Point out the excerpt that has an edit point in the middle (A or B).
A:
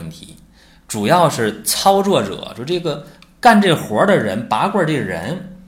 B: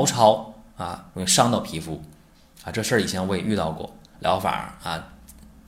B